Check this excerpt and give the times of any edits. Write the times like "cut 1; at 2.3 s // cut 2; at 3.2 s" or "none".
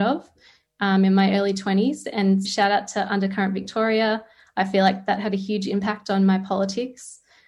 cut 1; at 2.4 s